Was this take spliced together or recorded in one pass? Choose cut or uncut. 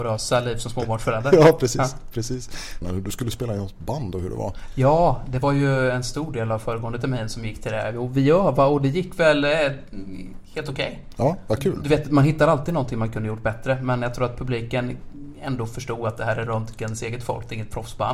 cut